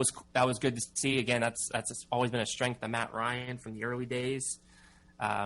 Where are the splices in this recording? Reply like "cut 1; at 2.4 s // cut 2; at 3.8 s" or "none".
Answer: none